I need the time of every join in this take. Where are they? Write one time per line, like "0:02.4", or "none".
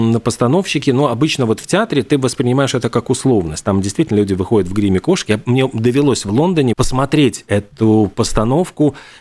0:06.7